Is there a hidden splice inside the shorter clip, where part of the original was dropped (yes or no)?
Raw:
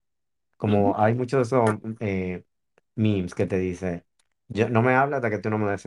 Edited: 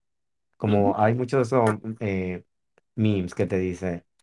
no